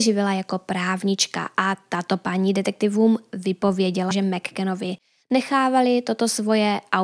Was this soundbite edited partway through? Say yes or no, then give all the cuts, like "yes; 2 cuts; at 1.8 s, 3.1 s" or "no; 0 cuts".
yes; 1 cut; at 4.1 s